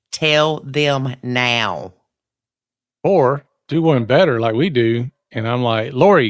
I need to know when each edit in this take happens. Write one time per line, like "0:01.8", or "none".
none